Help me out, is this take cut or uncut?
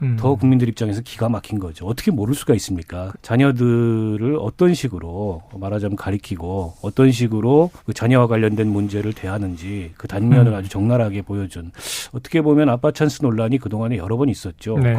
cut